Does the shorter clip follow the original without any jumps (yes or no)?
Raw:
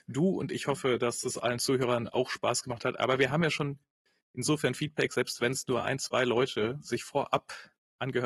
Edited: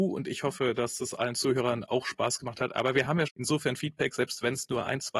no